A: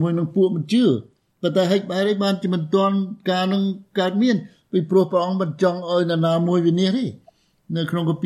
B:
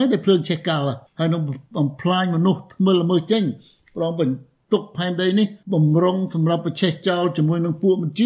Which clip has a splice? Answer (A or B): B